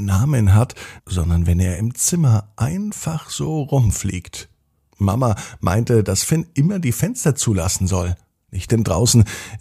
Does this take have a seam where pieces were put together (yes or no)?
yes